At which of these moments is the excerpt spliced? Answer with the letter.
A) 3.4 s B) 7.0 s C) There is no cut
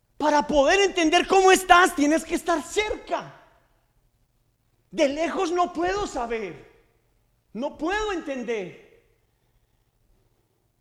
C